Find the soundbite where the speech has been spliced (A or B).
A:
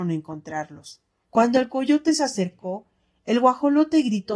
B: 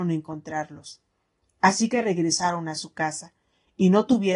A